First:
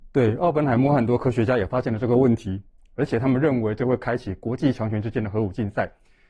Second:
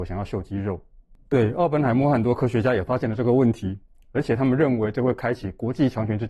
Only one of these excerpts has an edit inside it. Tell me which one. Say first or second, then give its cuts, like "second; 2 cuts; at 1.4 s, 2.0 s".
second; 1 cut; at 1.3 s